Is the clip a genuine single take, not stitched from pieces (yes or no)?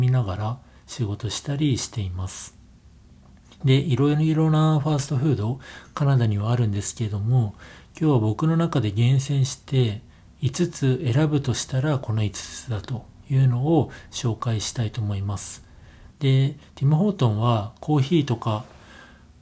no